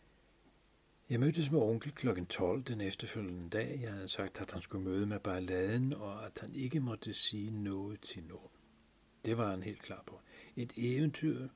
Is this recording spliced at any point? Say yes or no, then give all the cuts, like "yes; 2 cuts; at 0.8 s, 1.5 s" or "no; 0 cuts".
no; 0 cuts